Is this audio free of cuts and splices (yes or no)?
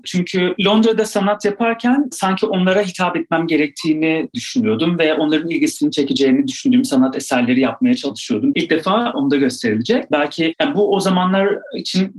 no